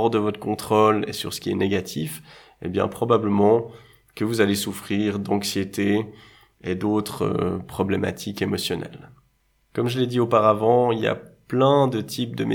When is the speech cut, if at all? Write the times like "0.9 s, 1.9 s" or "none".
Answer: none